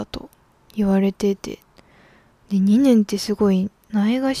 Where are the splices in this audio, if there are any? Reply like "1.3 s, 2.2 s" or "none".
none